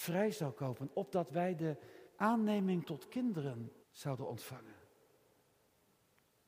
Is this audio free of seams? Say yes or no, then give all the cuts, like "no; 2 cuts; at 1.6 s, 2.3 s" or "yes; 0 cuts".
no; 2 cuts; at 2.1 s, 3.8 s